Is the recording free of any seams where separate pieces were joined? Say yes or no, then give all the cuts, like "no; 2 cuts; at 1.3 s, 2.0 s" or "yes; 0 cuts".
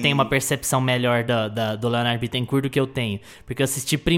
yes; 0 cuts